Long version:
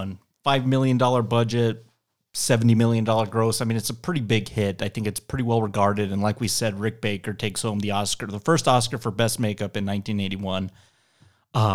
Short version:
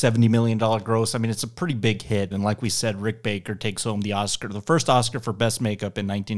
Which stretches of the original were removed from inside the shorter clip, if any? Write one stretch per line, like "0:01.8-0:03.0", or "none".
0:04.8-0:06.1